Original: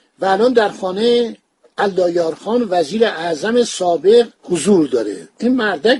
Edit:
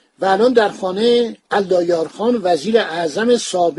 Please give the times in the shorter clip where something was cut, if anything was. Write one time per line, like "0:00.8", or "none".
0:01.4